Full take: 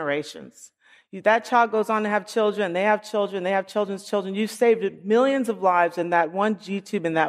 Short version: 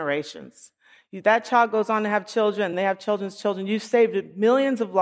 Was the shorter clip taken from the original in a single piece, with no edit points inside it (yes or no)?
no